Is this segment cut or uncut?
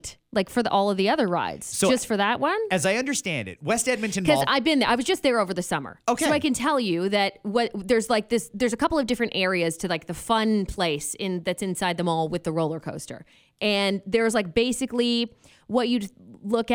uncut